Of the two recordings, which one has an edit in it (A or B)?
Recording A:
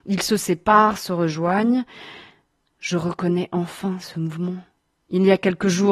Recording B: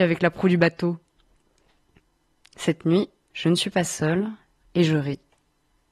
B